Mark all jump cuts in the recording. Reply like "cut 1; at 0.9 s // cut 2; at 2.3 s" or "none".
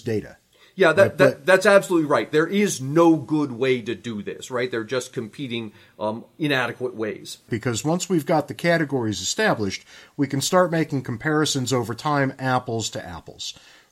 cut 1; at 7.5 s